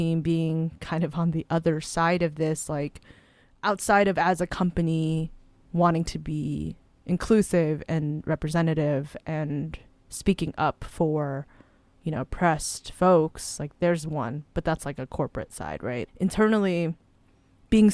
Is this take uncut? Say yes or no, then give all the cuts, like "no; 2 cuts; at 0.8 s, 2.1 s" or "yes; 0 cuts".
no; 1 cut; at 16.1 s